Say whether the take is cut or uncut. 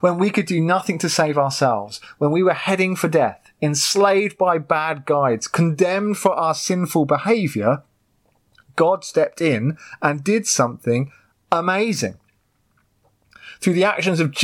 uncut